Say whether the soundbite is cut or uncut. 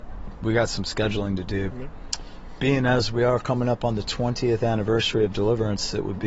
cut